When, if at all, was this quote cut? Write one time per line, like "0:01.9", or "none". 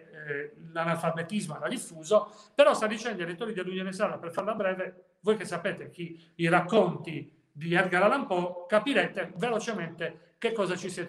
none

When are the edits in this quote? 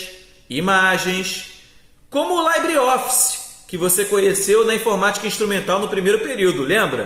none

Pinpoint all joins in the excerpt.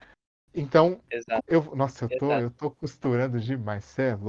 0:01.4

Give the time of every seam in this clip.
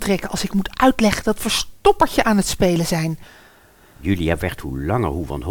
none

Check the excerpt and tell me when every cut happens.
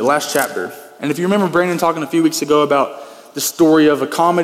none

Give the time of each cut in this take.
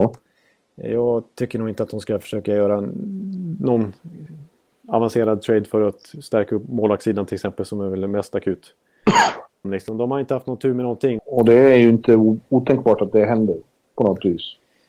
0:09.6
0:11.2

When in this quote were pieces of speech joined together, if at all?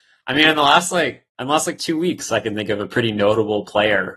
0:01.3

